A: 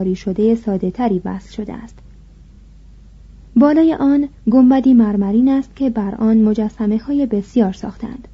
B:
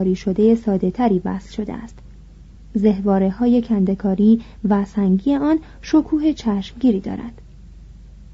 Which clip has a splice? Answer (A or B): B